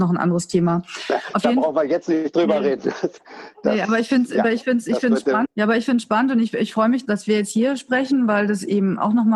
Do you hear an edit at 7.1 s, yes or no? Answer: yes